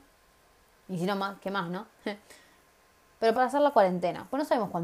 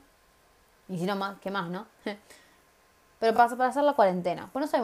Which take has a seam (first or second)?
first